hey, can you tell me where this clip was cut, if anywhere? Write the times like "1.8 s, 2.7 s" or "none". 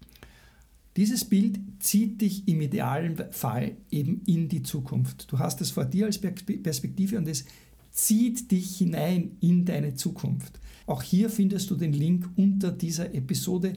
10.8 s